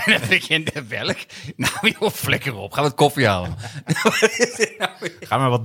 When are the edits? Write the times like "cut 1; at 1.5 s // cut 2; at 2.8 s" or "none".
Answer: none